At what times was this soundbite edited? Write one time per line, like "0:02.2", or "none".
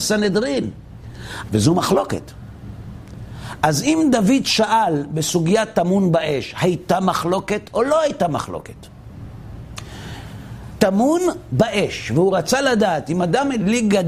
0:01.5
0:10.8